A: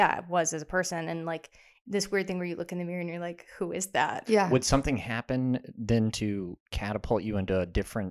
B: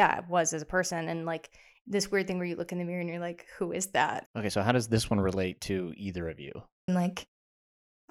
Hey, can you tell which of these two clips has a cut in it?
B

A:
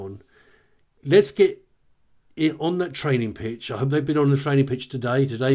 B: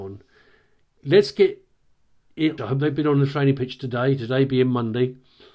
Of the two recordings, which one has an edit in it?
B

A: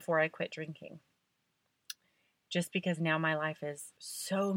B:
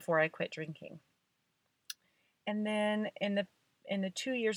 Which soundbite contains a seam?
A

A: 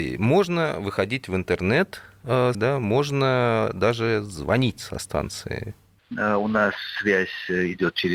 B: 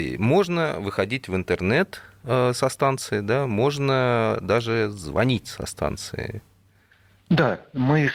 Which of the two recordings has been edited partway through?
A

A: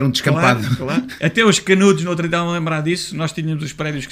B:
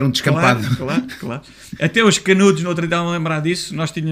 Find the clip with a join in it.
A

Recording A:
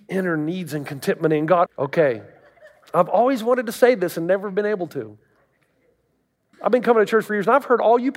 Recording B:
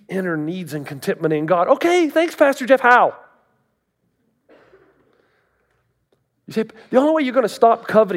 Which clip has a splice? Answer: A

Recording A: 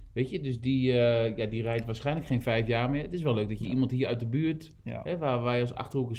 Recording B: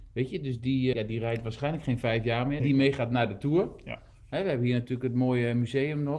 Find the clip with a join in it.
B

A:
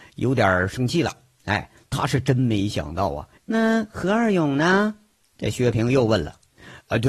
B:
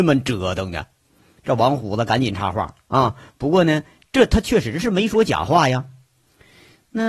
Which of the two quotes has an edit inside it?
A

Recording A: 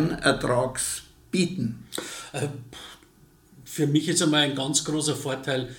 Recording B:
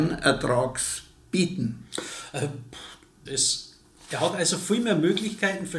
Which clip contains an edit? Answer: B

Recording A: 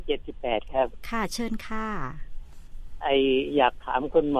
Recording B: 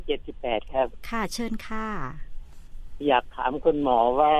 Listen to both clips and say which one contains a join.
B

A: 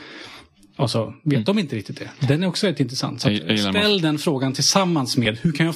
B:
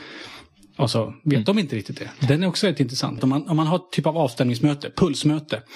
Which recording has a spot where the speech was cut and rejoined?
B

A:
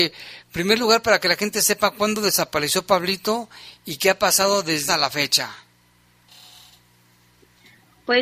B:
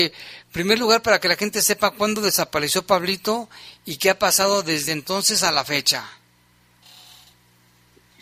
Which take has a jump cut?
A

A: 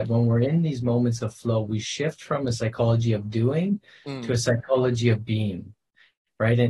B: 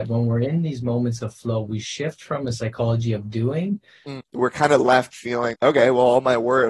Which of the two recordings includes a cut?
B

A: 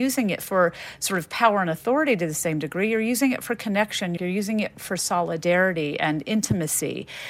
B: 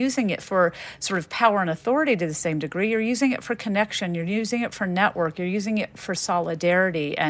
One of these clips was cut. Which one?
A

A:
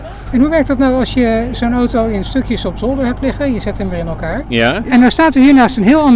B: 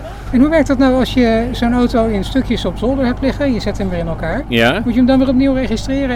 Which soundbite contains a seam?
A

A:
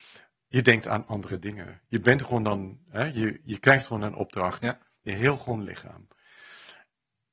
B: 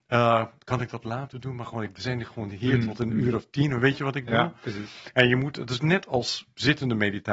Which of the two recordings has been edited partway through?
A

